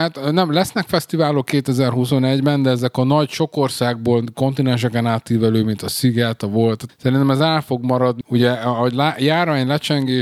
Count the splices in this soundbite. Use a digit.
2